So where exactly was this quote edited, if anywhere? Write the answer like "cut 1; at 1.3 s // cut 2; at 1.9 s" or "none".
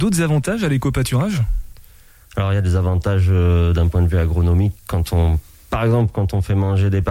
none